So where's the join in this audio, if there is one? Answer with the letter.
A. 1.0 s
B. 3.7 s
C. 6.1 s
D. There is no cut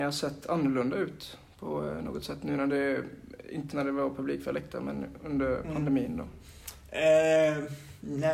B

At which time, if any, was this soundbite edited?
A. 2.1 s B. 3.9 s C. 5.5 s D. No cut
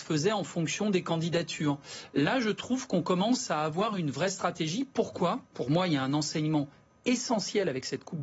C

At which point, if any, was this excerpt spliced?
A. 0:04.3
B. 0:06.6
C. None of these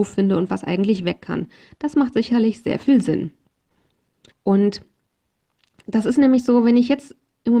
A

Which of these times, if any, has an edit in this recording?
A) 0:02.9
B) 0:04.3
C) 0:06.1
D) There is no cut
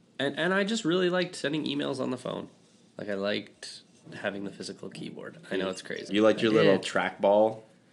C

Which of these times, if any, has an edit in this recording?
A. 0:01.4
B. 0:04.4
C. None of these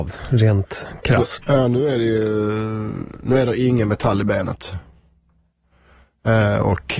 A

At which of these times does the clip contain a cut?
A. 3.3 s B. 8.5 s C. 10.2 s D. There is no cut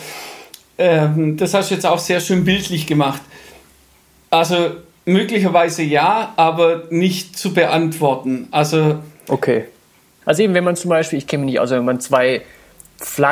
C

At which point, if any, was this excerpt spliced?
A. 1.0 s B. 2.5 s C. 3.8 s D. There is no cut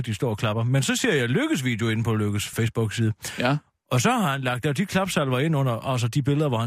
B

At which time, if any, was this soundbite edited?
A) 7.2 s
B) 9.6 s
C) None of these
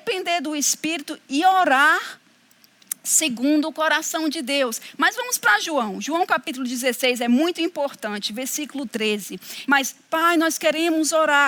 B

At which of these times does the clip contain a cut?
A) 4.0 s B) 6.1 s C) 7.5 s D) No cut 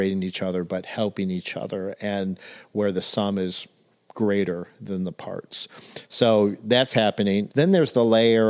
C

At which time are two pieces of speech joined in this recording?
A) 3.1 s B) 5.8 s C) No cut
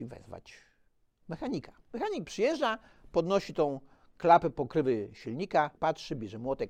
B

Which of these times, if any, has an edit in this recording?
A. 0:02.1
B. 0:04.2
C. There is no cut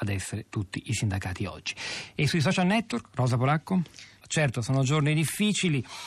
B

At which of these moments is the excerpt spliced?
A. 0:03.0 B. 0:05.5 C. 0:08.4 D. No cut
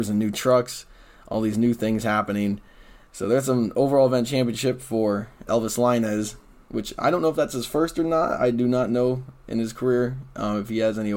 B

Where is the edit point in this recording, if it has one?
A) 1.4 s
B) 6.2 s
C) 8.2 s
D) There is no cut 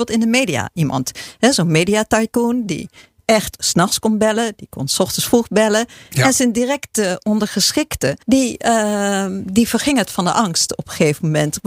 C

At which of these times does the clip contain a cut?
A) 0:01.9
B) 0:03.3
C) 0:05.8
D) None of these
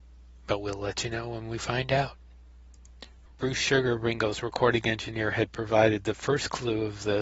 B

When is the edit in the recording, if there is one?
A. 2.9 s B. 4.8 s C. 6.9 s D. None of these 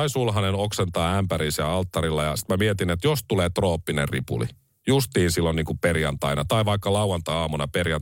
D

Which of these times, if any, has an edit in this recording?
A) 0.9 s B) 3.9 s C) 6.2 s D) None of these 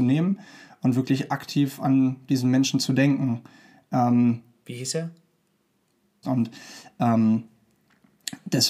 C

